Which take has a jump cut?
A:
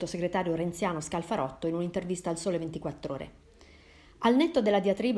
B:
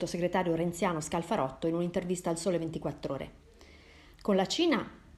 B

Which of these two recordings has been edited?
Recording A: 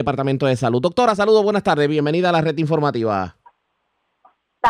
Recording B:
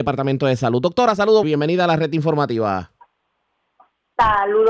B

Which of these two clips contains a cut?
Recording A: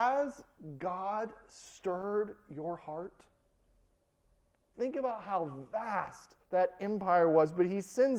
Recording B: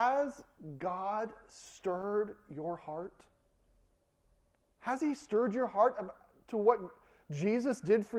A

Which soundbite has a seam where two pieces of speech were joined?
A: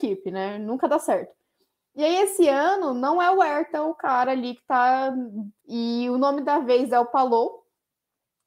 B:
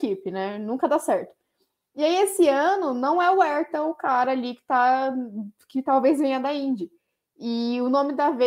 A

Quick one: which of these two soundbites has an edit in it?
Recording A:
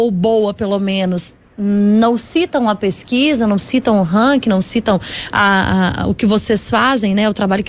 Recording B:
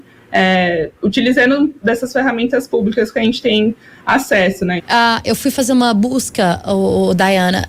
B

